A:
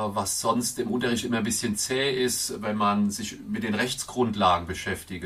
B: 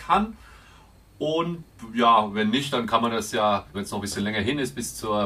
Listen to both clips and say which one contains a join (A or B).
B